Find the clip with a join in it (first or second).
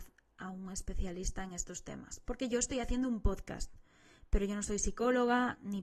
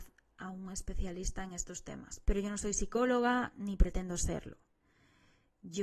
second